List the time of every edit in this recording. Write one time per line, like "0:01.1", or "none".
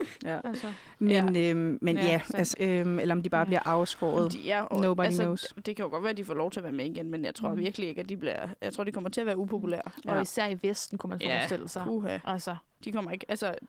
0:02.5